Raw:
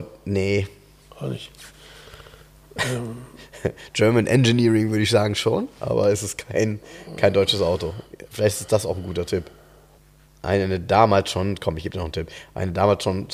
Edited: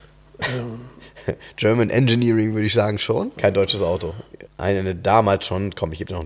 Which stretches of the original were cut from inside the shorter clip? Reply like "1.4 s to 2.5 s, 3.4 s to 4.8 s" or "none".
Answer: 5.7 s to 7.2 s, 8.3 s to 10.3 s